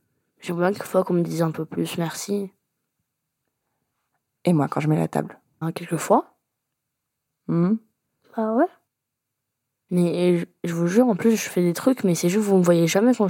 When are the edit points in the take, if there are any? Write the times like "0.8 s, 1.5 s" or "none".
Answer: 5.6 s, 8.2 s